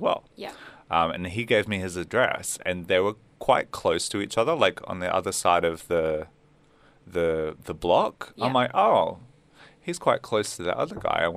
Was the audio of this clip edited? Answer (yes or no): no